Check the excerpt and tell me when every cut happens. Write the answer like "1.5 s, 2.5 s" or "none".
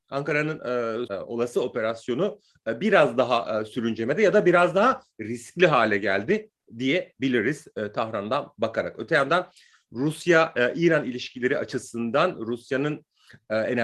1.1 s